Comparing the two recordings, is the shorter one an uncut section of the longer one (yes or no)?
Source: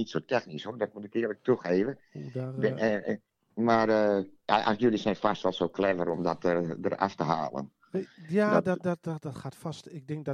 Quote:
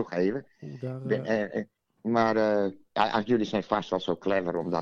yes